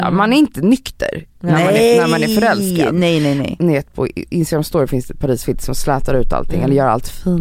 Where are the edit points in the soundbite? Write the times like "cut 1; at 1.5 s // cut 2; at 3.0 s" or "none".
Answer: cut 1; at 3.6 s